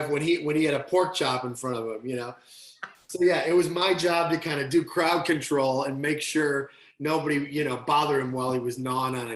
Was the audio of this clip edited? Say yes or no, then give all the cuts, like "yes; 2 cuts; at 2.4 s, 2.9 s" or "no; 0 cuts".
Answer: no; 0 cuts